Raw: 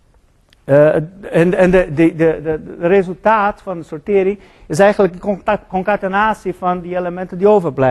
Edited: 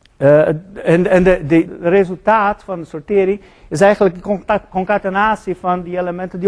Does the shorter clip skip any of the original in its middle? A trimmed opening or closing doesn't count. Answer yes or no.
yes